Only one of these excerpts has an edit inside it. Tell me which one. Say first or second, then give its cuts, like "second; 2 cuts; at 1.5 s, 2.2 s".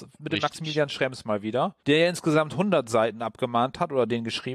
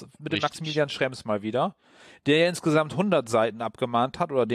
first; 1 cut; at 1.8 s